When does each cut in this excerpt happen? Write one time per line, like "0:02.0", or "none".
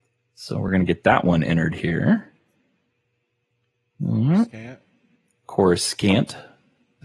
none